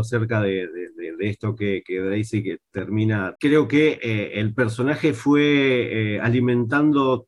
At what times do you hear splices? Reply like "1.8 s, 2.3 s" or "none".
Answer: 3.4 s